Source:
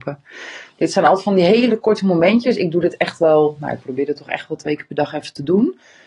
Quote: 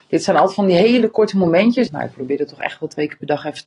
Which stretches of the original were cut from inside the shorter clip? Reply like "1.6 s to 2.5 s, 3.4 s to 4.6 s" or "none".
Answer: 2.6 s to 3.6 s